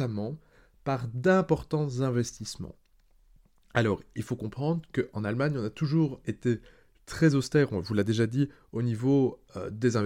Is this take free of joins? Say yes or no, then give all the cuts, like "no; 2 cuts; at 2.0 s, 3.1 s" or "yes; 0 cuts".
yes; 0 cuts